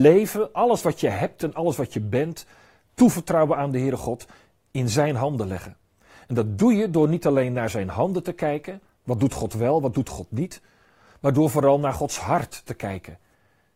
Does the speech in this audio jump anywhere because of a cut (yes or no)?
no